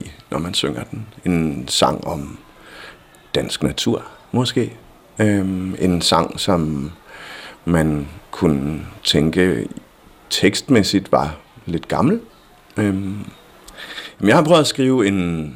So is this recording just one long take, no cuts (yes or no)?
yes